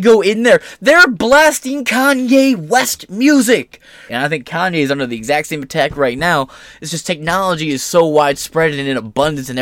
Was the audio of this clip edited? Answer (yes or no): yes